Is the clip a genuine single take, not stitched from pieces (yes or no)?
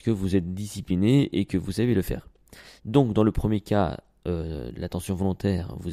no